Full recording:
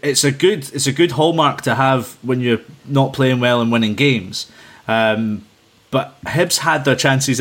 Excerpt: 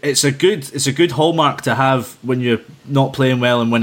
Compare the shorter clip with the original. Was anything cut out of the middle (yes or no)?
no